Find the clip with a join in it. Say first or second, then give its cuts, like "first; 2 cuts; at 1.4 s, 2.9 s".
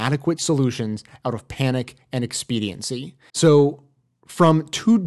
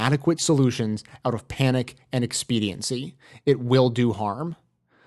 first; 1 cut; at 3.3 s